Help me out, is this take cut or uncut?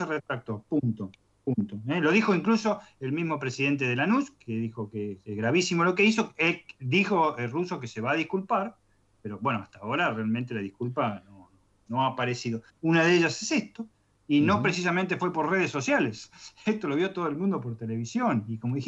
cut